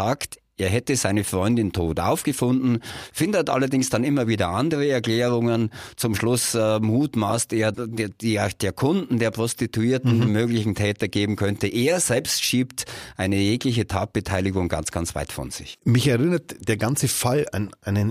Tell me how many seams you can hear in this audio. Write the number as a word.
two